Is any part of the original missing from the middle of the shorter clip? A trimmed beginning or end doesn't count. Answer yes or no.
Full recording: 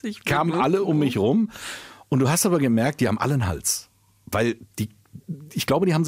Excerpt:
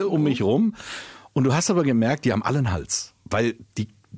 yes